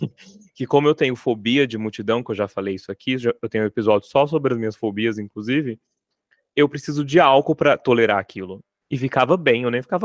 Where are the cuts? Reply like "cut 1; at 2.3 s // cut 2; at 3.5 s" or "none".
cut 1; at 8.8 s

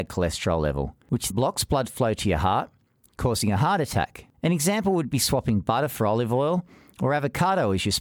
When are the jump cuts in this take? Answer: cut 1; at 1.3 s // cut 2; at 4.3 s

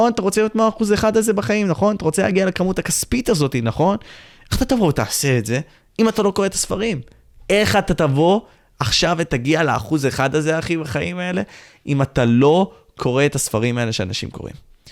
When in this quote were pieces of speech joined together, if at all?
cut 1; at 7.3 s

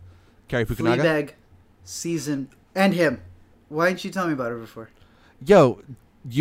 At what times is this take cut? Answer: cut 1; at 3.5 s

